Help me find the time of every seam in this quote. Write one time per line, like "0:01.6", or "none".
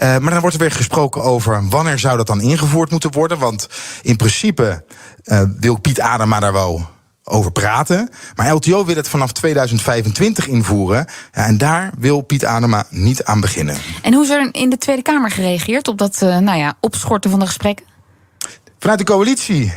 none